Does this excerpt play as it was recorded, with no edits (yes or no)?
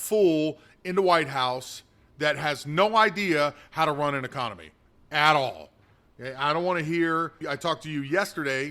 no